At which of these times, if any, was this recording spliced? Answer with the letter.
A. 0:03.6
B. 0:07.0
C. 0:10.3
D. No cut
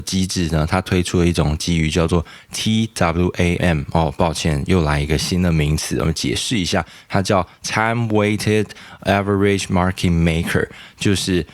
A